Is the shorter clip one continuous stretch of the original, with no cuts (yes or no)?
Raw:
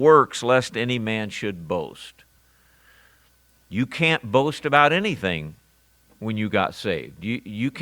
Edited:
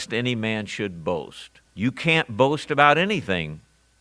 no